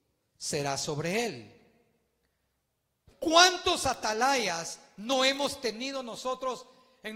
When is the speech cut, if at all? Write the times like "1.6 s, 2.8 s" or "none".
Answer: 3.1 s